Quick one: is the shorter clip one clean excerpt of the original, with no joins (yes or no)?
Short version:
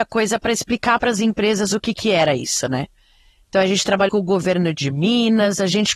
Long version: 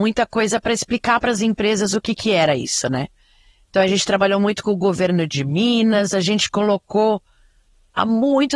no